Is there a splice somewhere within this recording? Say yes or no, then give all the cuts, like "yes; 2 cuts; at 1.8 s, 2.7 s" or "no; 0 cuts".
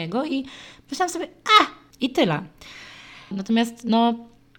yes; 2 cuts; at 1.9 s, 3.3 s